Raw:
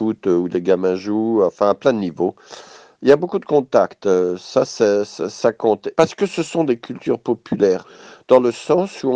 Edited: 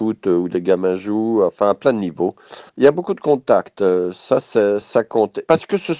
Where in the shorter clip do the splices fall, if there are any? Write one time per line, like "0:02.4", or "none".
0:02.7
0:04.8